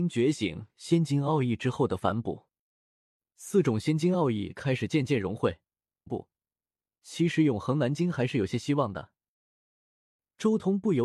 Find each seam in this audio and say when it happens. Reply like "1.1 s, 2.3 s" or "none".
6.1 s

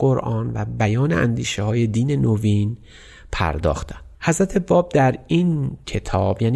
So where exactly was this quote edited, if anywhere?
4.1 s

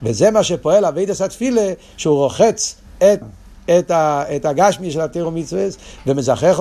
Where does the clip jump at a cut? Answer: 3.2 s

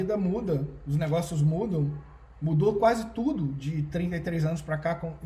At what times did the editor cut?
none

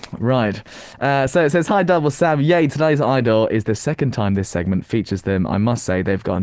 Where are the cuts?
none

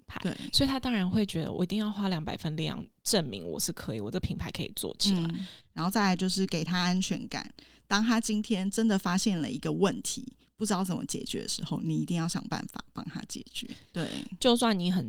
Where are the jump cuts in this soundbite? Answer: 5.6 s, 13.9 s

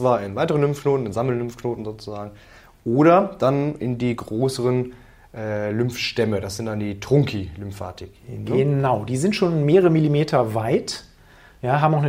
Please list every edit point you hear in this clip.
none

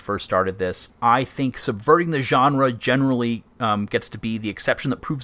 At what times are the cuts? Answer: none

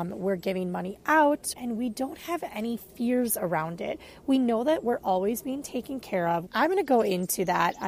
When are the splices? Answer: 1.5 s, 6.5 s

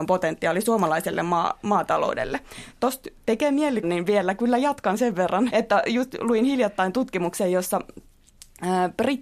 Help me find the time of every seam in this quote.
3.8 s, 5.5 s

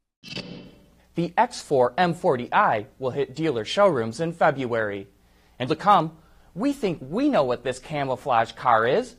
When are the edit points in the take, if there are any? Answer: 1.0 s, 5.7 s

